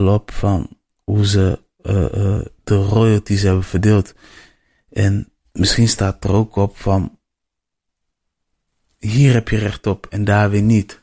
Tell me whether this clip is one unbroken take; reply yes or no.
yes